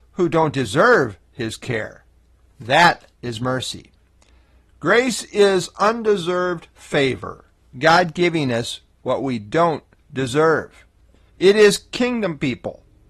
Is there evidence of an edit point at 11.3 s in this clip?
yes; 1 cut; at 11.3 s

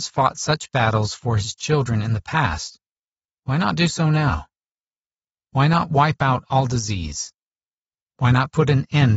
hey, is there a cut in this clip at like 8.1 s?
no; 0 cuts

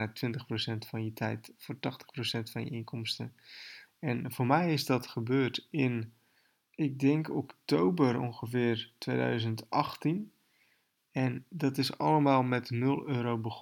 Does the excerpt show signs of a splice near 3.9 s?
yes; 3 cuts; at 3.9 s, 6.7 s, 11.0 s

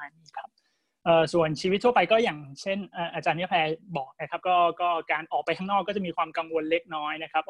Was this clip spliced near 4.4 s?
no; 0 cuts

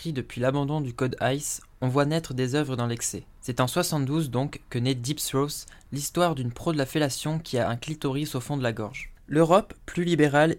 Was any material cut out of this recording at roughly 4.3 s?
no; 1 cut; at 9.3 s

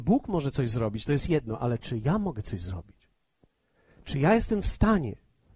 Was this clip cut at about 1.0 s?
no; 0 cuts

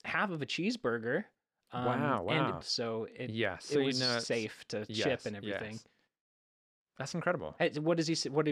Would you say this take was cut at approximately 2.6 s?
yes; 1 cut; at 2.6 s

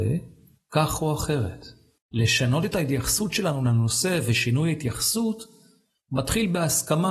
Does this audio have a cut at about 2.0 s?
yes; 1 cut; at 2.0 s

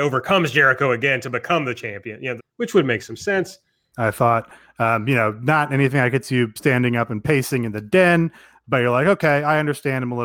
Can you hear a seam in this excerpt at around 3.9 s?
yes; 2 cuts; at 2.4 s, 3.9 s

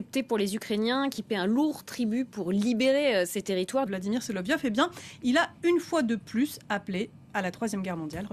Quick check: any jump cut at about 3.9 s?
yes; 1 cut; at 3.9 s

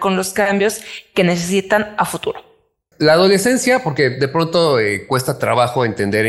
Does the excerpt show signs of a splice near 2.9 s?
yes; 1 cut; at 2.9 s

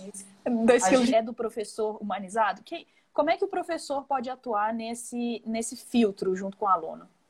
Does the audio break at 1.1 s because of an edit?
yes; 1 cut; at 1.1 s

